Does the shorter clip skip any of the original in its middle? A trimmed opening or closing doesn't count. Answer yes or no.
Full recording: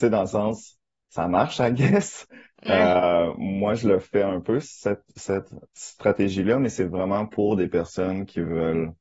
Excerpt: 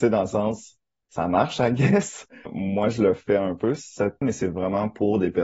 yes